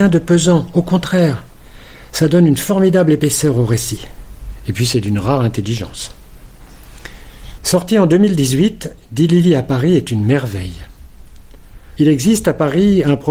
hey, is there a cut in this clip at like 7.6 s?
yes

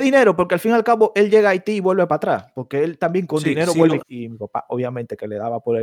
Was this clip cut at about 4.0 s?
yes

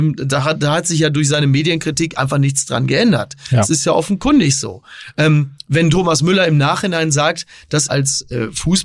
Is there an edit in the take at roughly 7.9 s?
yes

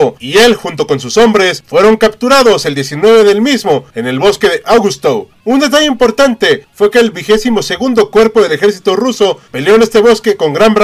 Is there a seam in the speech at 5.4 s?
no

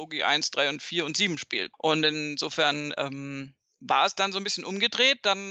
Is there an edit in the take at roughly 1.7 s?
yes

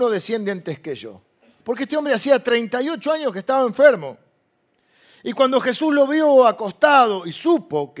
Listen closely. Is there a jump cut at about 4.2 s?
no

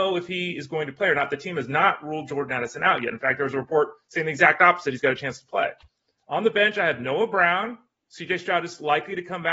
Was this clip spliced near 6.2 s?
yes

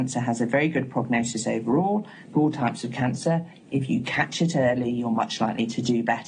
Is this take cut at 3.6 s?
no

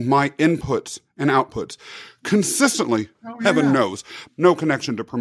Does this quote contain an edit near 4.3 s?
yes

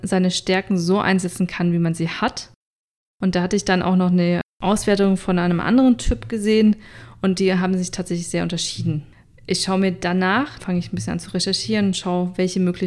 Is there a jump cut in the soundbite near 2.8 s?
no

